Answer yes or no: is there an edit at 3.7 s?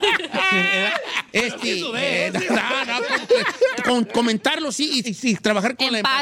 yes